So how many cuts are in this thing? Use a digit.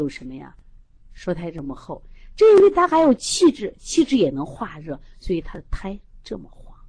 0